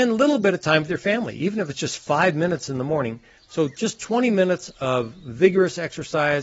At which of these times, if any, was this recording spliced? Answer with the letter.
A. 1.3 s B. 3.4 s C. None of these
B